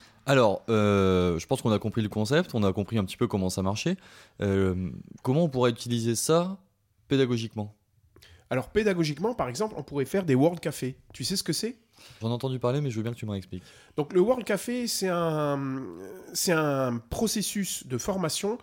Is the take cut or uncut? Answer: cut